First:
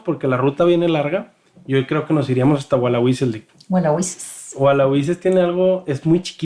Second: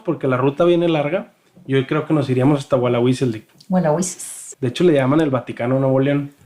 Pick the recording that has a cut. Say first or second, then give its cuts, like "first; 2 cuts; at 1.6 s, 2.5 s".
second; 1 cut; at 4.5 s